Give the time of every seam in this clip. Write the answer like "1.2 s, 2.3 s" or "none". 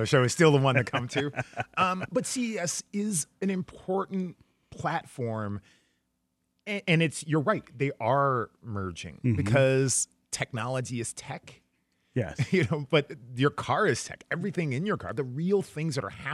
none

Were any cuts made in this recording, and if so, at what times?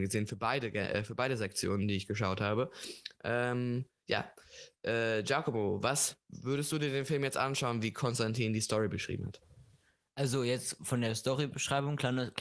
none

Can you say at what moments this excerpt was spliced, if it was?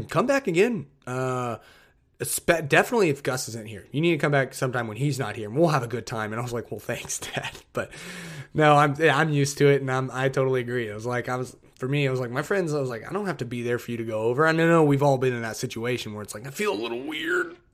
none

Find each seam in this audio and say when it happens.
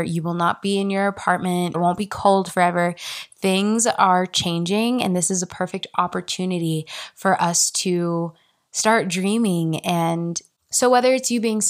1.7 s

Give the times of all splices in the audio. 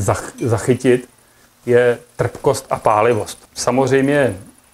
3.5 s

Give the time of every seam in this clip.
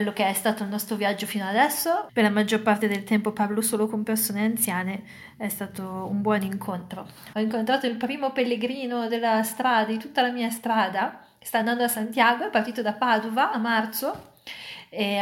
2.1 s, 7.3 s

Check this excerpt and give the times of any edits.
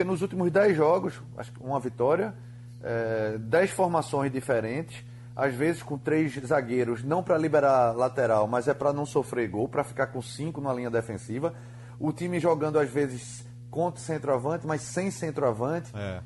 none

